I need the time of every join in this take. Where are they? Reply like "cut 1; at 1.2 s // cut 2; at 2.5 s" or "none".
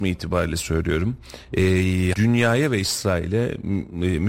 cut 1; at 2.1 s